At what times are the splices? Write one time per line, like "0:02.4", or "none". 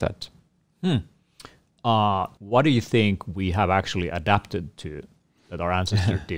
0:02.4

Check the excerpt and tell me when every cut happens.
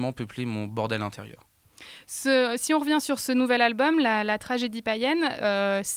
none

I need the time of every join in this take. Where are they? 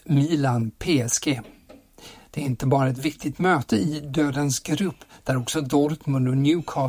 none

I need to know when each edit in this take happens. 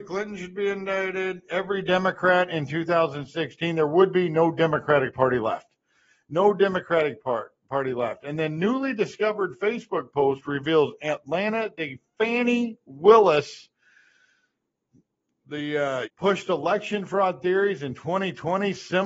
0:16.0

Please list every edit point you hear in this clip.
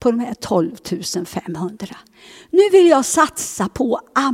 none

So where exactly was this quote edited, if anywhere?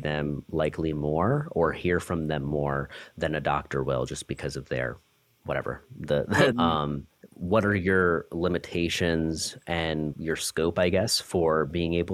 0:06.5
0:10.1

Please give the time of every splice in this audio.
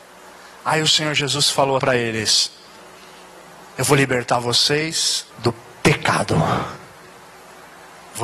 0:01.8
0:05.3

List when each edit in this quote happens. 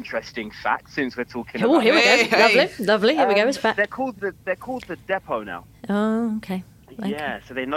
none

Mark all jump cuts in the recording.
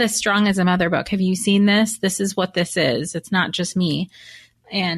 none

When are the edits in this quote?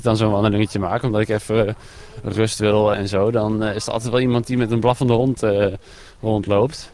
0:02.9

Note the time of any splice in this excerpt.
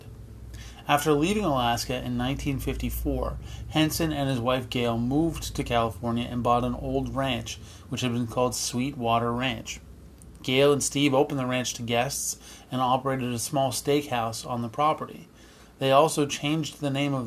none

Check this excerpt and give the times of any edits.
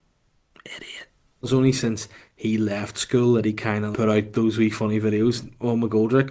0:01.4
0:03.9

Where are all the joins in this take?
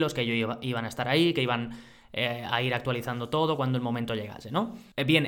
none

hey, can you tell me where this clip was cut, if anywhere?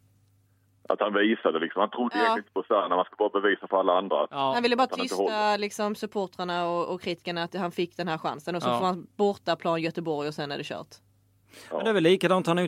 none

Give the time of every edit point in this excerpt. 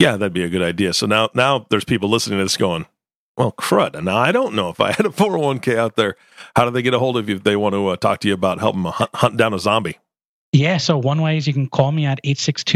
none

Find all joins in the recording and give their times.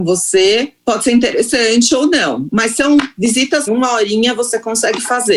0:03.7

